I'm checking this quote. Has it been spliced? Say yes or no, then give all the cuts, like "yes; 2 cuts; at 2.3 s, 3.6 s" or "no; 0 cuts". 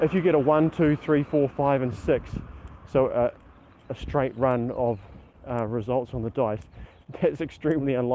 no; 0 cuts